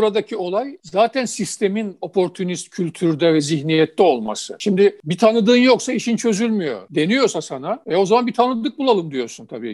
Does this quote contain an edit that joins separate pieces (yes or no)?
no